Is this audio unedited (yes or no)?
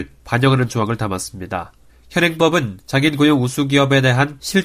no